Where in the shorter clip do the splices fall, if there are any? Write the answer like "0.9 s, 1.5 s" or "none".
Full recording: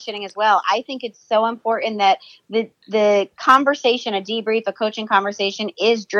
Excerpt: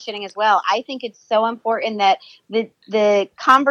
none